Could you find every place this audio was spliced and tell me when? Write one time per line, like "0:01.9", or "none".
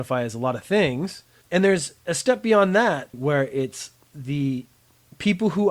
0:01.4
0:03.1